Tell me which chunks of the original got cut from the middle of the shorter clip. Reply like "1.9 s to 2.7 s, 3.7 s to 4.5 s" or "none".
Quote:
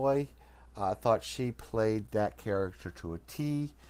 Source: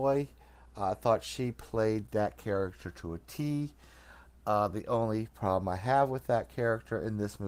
none